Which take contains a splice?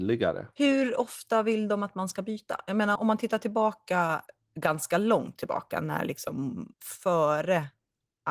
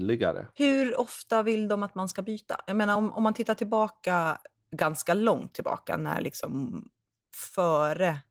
first; 2 cuts; at 3.0 s, 6.7 s

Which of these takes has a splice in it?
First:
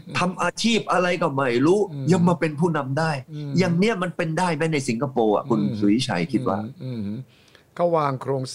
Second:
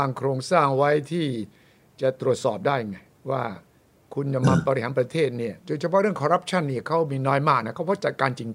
second; 1 cut; at 5.6 s

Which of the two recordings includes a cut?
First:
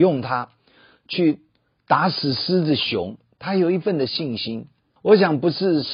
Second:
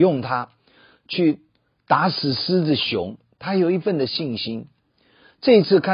first; 1 cut; at 5.0 s

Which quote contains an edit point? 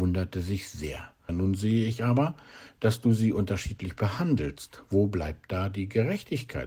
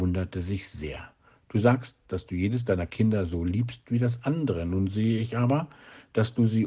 first; 1 cut; at 1.3 s

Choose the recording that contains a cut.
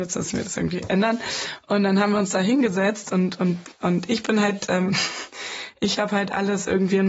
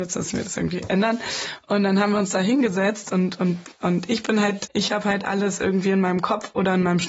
second; 1 cut; at 4.7 s

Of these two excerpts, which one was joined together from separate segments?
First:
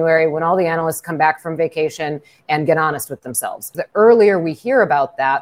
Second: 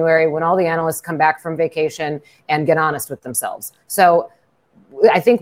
first; 1 cut; at 3.7 s

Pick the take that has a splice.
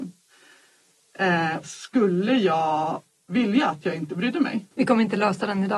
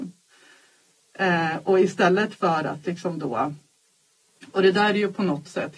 first; 2 cuts; at 1.6 s, 4.7 s

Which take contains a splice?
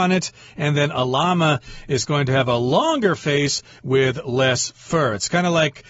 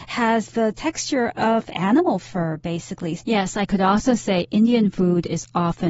second; 2 cuts; at 3.2 s, 4.5 s

